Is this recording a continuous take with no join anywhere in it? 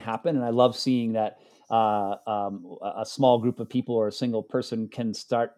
yes; 0 cuts

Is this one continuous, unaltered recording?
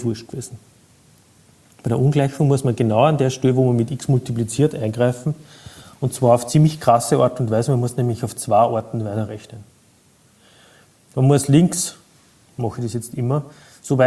yes; 0 cuts

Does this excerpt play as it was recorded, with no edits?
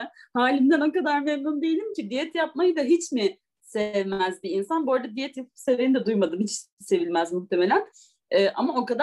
yes; 0 cuts

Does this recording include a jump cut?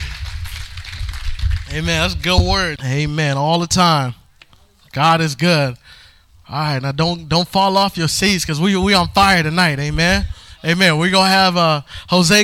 yes; 1 cut; at 2.8 s

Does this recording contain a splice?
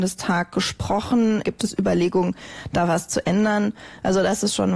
yes; 1 cut; at 1.4 s

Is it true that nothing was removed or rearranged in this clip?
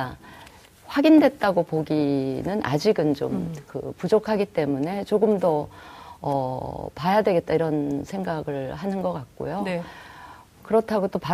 yes; 0 cuts

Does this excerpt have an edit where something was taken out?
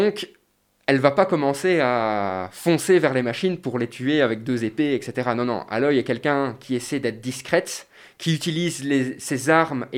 no; 0 cuts

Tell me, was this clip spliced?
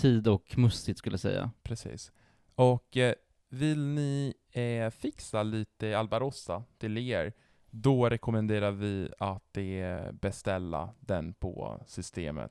no; 0 cuts

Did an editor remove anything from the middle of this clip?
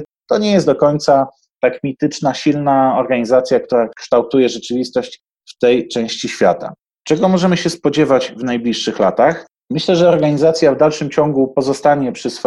no; 0 cuts

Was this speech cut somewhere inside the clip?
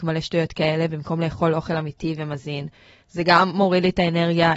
no; 0 cuts

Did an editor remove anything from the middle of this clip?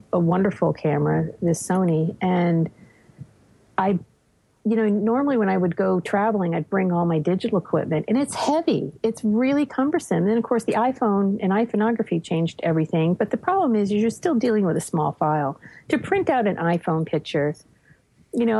no; 0 cuts

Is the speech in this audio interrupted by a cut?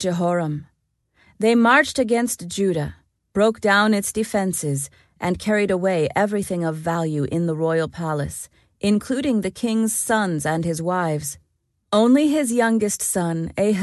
no; 0 cuts

